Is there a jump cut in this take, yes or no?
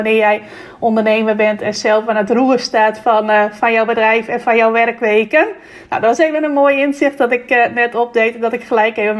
no